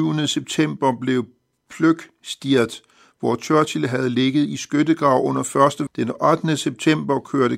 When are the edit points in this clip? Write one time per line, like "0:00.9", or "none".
0:05.9